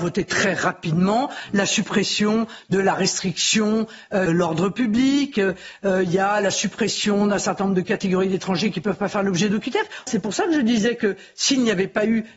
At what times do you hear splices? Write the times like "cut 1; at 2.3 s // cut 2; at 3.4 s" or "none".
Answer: cut 1; at 4.3 s // cut 2; at 10.1 s